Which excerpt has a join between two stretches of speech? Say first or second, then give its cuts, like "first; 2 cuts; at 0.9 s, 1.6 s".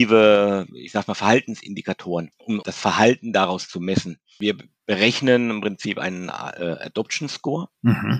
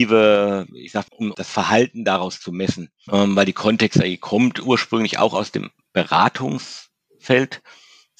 second; 2 cuts; at 1.1 s, 3.1 s